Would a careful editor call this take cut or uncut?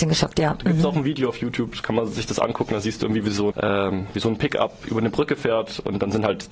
cut